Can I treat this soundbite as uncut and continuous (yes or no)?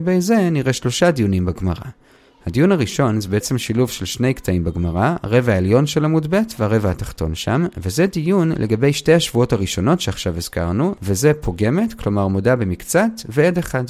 yes